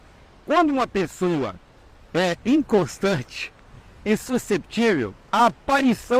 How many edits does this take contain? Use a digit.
1